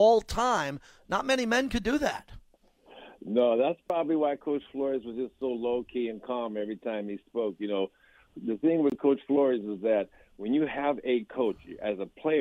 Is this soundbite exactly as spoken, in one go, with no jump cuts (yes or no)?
yes